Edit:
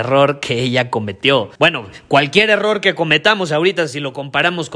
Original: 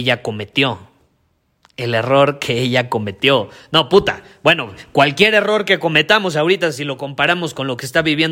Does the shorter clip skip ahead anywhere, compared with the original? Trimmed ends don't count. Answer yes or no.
yes